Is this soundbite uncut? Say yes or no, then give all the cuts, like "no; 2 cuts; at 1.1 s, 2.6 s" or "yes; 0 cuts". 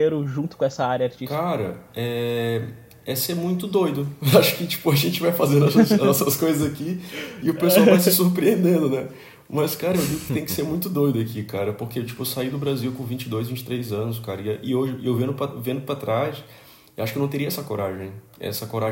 yes; 0 cuts